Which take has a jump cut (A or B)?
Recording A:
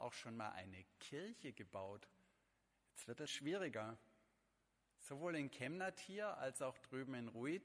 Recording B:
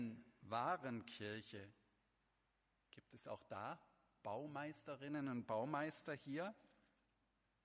A